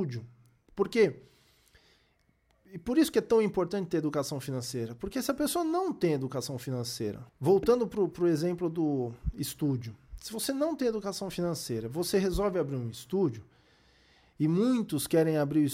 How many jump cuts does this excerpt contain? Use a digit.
1